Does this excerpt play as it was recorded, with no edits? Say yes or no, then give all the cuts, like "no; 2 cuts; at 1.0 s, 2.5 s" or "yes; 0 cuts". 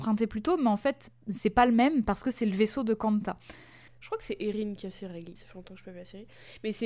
no; 2 cuts; at 3.9 s, 5.4 s